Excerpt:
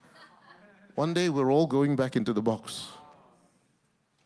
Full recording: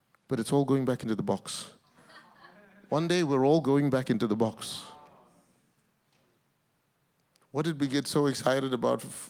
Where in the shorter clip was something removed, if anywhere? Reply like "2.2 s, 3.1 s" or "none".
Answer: none